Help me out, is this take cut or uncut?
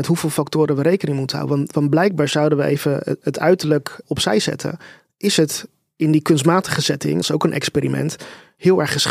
cut